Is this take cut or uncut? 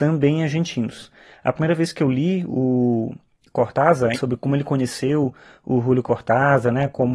cut